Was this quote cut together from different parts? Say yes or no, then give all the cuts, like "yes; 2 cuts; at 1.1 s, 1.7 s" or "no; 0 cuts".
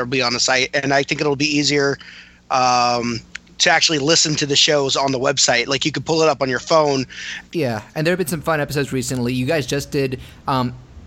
yes; 1 cut; at 7.5 s